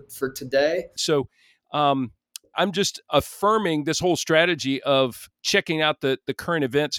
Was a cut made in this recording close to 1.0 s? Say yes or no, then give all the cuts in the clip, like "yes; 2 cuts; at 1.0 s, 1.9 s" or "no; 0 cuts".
yes; 2 cuts; at 1.0 s, 2.5 s